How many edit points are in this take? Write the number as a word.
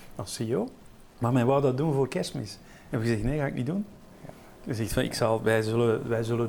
one